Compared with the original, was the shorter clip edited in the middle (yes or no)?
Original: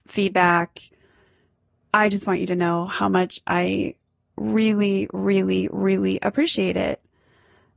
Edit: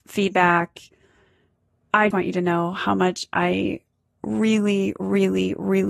yes